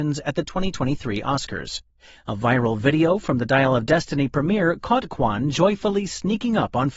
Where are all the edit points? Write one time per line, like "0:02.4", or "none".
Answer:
0:02.2